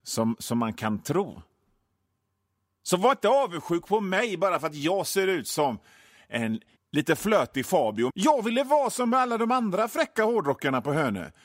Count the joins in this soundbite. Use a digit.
2